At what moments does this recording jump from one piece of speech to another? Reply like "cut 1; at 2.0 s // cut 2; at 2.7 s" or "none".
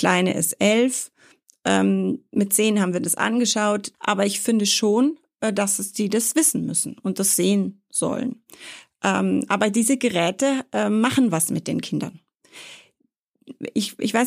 cut 1; at 3.9 s